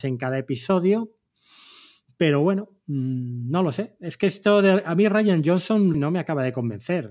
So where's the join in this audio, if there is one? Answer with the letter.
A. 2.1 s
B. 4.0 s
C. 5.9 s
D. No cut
C